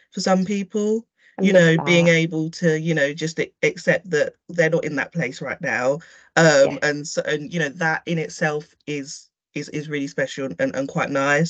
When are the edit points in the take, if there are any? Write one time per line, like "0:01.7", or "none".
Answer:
none